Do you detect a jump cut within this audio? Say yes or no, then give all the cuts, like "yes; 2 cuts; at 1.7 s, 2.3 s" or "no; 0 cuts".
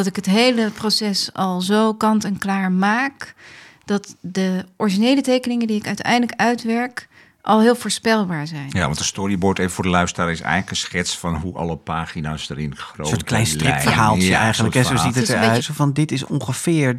yes; 1 cut; at 15.6 s